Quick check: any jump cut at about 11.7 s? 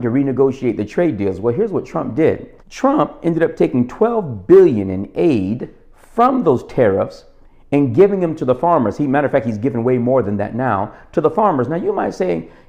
no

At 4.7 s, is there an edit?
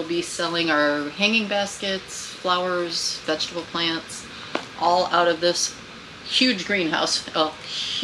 no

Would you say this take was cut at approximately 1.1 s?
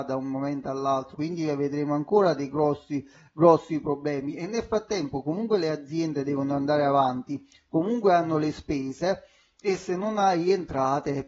yes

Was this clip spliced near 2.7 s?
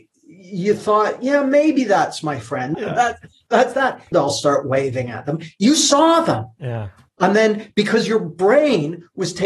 yes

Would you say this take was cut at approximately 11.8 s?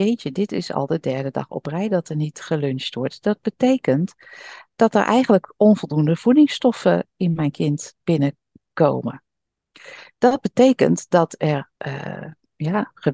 yes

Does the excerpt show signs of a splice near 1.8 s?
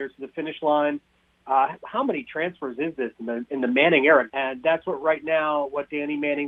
no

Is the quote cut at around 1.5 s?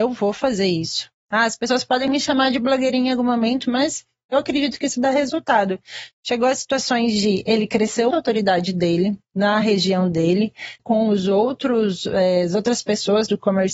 no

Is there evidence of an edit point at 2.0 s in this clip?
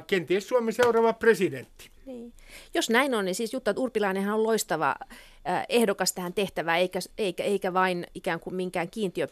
yes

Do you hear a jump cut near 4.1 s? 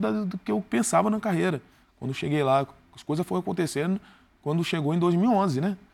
no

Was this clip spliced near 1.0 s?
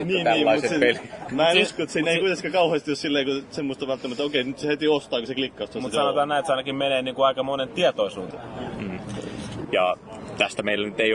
no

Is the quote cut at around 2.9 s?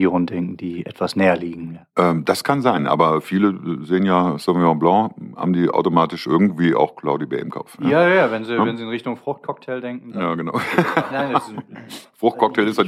no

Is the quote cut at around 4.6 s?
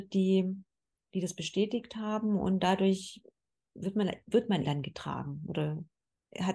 yes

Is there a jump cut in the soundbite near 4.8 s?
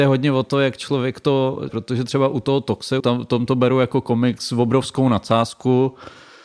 no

